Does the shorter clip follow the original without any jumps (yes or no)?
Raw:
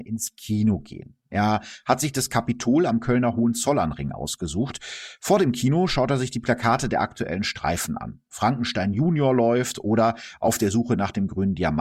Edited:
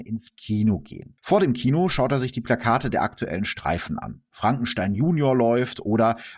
no